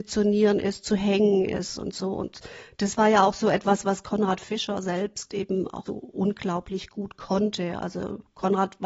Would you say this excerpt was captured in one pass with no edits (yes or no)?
no